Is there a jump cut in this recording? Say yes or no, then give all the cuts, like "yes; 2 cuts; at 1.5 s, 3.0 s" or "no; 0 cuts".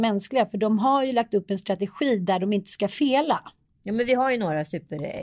no; 0 cuts